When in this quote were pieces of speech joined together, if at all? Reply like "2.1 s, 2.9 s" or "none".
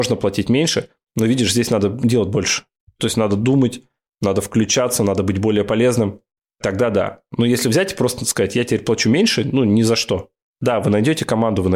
none